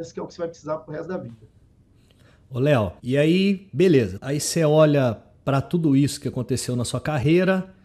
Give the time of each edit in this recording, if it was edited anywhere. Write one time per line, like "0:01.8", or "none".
0:03.0
0:04.2